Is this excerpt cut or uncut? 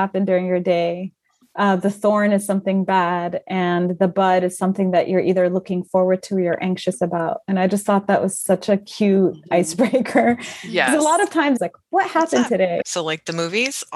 cut